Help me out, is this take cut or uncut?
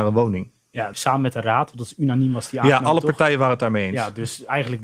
cut